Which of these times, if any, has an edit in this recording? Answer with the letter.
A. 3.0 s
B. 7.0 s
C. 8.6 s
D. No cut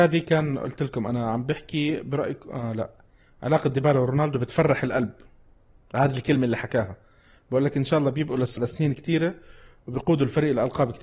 C